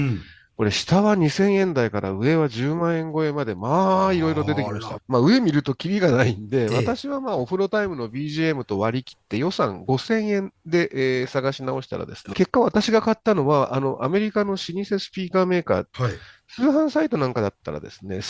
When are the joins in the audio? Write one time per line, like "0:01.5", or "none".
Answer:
0:05.0
0:12.3
0:15.9